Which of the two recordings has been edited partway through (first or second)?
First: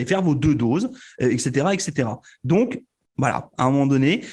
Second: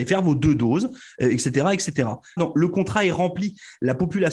second